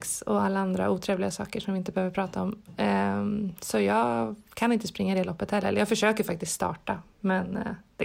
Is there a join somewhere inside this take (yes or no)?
no